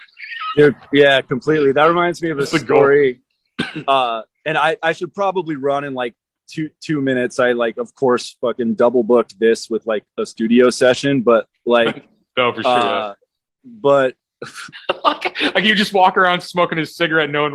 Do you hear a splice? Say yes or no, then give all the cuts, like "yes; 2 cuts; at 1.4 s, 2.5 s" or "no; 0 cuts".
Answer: yes; 1 cut; at 14.7 s